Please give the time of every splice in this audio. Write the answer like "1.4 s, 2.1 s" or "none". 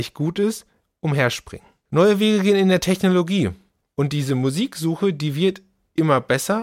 3.8 s